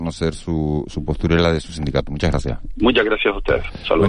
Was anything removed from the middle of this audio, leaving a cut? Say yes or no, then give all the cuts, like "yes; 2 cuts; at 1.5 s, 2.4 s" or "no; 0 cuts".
no; 0 cuts